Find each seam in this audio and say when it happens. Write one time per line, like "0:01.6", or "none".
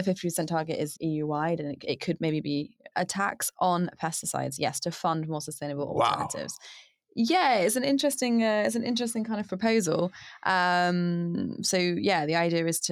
0:01.0
0:02.9